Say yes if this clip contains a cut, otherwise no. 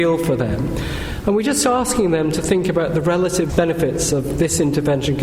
yes